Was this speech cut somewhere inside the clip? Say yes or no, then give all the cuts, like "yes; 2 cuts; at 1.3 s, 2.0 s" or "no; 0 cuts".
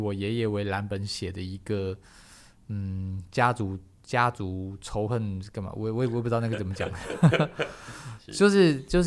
no; 0 cuts